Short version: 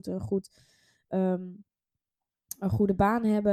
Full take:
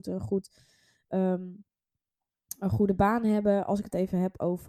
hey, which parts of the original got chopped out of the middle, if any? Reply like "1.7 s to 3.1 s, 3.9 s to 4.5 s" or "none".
none